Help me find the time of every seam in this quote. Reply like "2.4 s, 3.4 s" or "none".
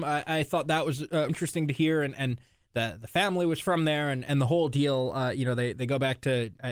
1.3 s